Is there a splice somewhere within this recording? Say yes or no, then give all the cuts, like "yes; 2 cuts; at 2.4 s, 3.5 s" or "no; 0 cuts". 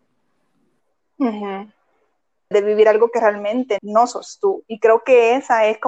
yes; 2 cuts; at 2.5 s, 3.8 s